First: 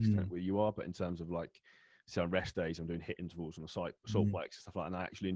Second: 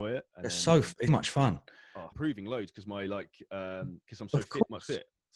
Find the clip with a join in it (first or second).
second